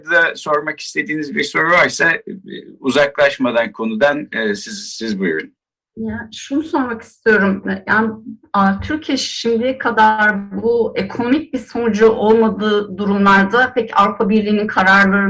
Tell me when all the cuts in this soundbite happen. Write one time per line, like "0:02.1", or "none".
none